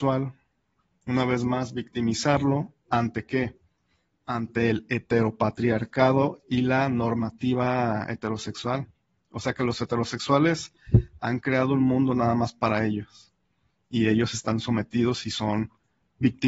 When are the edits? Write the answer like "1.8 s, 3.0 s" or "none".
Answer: none

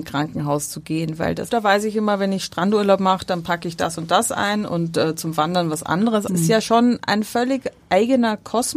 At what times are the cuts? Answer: 1.5 s, 6.3 s

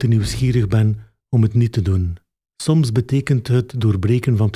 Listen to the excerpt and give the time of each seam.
2.5 s

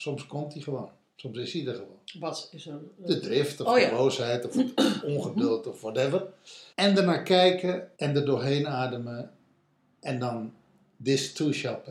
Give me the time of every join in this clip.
6.7 s, 8.0 s

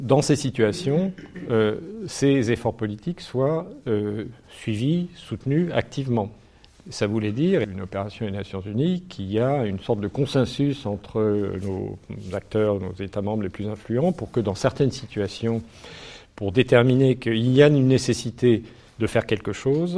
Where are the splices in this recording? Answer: 7.6 s

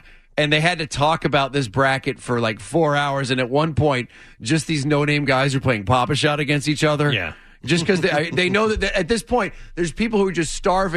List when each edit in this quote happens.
none

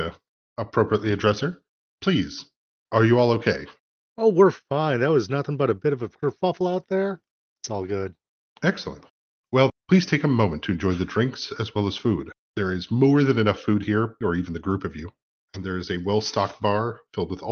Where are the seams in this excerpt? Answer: 9.7 s, 12.3 s, 14.2 s

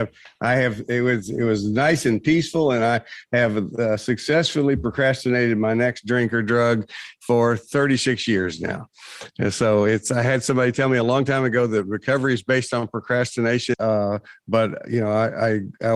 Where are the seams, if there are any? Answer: 13.7 s

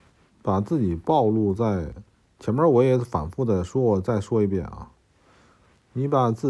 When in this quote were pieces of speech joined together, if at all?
none

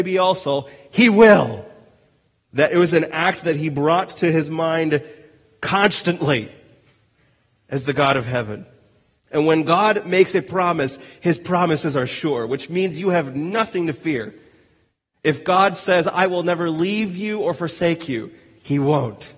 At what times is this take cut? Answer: 2.4 s, 9.2 s

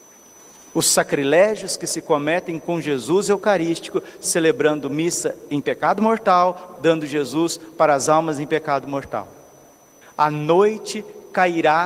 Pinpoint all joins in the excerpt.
6.8 s, 10.0 s

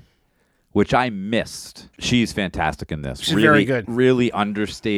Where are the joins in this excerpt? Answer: 1.9 s

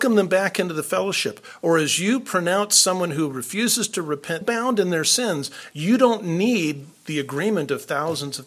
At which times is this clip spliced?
4.4 s, 5.7 s

